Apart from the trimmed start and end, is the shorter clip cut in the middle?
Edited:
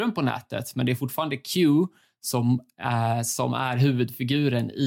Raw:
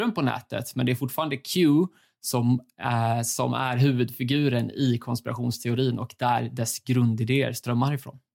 no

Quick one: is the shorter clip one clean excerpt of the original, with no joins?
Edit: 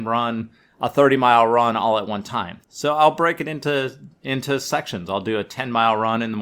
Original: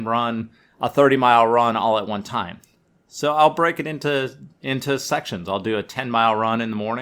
no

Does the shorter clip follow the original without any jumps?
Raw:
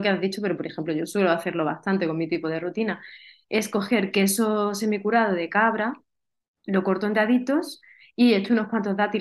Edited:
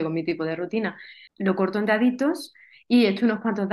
no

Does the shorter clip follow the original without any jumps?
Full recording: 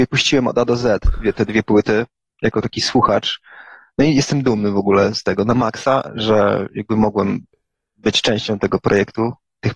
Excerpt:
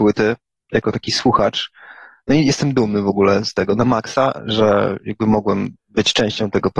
no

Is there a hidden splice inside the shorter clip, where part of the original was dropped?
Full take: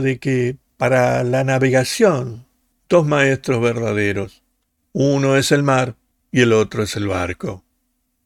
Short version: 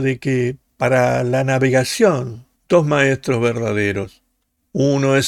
yes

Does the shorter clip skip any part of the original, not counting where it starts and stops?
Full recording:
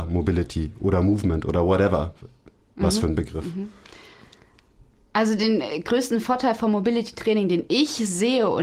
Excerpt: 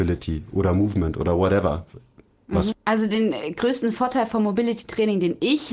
yes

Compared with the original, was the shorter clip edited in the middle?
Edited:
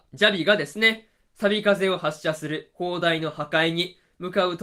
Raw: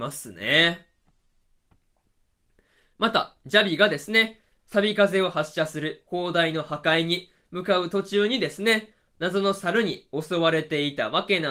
no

